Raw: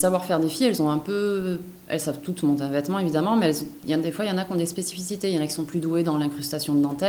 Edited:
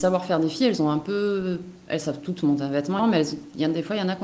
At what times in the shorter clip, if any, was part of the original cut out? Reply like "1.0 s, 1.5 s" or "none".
3.0 s